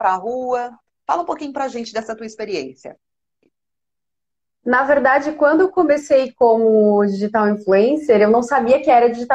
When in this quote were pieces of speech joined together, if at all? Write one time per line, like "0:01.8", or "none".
none